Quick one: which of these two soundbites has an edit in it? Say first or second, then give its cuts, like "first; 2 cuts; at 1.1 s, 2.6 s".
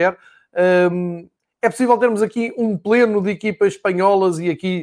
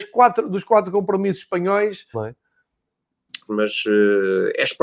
second; 2 cuts; at 2.1 s, 3.5 s